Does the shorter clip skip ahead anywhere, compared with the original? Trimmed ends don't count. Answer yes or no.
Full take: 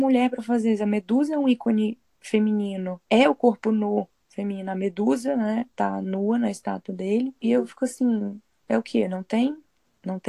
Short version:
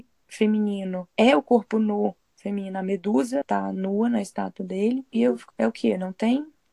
yes